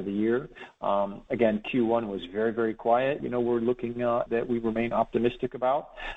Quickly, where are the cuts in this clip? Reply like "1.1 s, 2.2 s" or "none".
3.2 s, 4.3 s